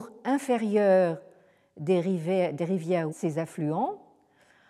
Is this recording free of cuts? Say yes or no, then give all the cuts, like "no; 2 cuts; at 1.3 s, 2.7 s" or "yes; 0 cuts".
no; 1 cut; at 3.1 s